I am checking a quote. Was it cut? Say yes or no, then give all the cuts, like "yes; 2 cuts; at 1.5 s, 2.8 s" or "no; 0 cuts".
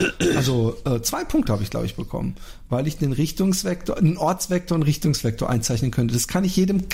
no; 0 cuts